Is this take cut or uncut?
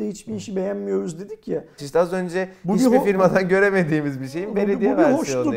cut